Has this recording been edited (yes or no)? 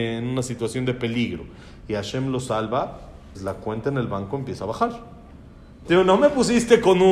yes